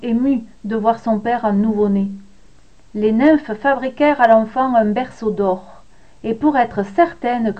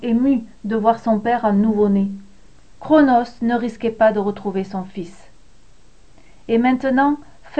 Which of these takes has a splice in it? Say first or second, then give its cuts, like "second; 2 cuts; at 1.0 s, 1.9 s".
second; 1 cut; at 2.7 s